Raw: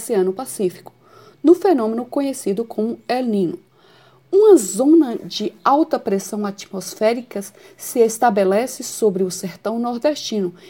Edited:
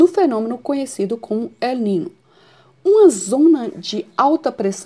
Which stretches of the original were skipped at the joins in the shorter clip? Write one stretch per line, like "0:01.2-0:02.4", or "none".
none